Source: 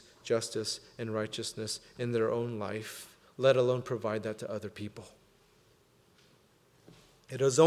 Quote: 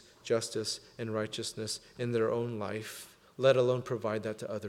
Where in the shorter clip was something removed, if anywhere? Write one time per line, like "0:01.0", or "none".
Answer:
none